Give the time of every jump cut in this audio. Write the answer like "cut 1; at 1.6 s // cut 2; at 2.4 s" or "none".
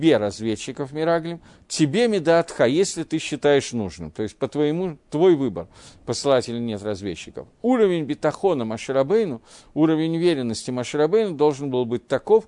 none